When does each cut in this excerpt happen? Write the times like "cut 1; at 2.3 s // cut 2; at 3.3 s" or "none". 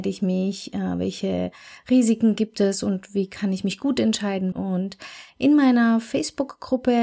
cut 1; at 4.5 s